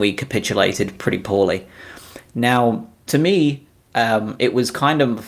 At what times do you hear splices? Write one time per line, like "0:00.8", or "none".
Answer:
none